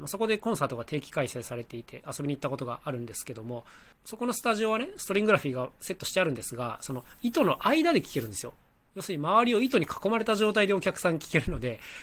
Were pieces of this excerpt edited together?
yes; 1 cut; at 3.9 s

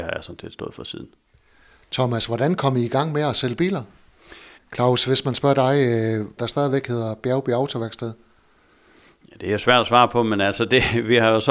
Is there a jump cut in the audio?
yes; 2 cuts; at 4.5 s, 6.4 s

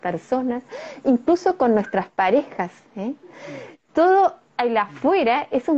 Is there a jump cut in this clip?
no; 0 cuts

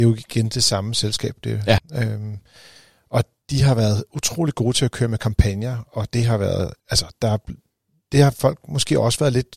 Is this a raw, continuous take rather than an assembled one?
no; 2 cuts; at 1.8 s, 6.8 s

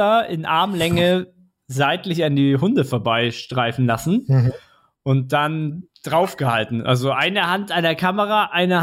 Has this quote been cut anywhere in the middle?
no; 0 cuts

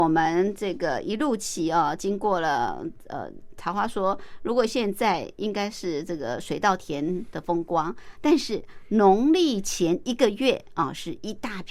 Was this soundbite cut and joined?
no; 0 cuts

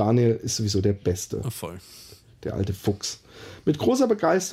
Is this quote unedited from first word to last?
yes; 0 cuts

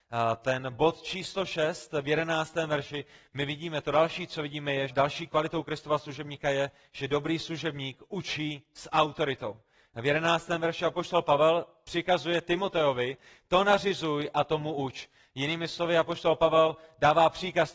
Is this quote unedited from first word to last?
no; 1 cut; at 4.9 s

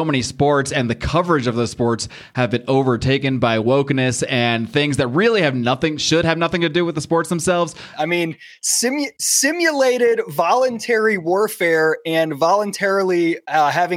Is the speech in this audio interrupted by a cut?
yes; 1 cut; at 7.9 s

